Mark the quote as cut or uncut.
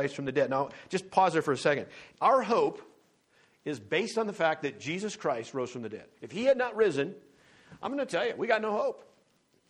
cut